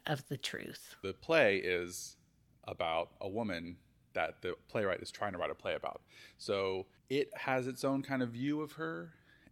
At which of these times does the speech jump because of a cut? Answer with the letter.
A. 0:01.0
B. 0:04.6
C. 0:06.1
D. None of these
D